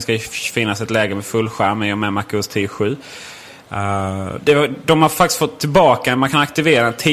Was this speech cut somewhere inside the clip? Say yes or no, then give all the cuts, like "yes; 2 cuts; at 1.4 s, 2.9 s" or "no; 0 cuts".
yes; 1 cut; at 4.4 s